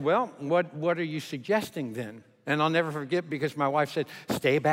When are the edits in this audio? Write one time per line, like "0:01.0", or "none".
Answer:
0:02.4